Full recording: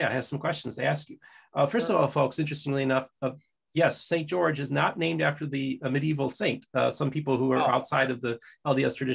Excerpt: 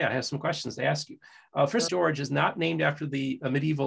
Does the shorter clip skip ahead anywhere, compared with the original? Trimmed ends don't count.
yes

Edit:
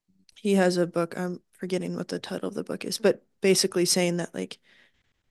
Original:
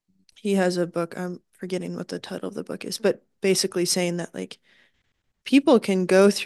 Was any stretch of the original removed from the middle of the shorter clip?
no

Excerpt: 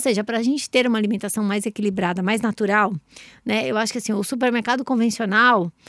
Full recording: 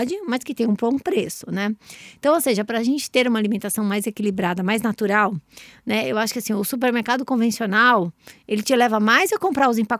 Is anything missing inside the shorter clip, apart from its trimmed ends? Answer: no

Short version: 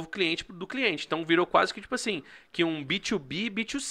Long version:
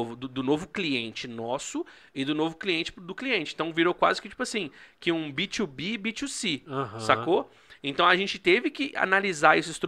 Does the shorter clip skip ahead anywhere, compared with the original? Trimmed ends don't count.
no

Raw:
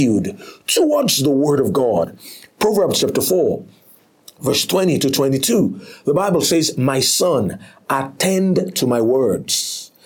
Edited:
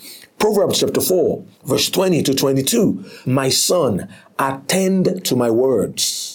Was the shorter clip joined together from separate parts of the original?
yes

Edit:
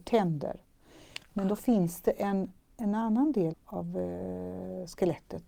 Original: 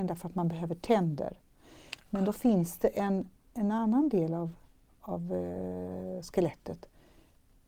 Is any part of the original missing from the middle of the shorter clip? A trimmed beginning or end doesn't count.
yes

